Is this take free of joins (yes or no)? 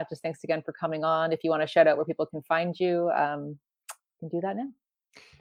yes